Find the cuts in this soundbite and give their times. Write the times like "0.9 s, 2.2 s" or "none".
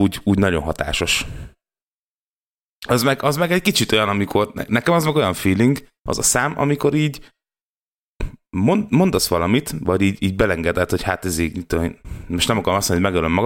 6.0 s